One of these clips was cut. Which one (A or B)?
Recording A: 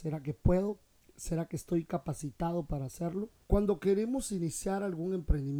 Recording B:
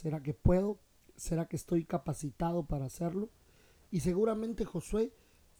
A